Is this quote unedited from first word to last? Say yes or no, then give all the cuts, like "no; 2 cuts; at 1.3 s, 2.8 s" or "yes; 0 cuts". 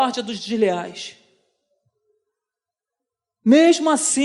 yes; 0 cuts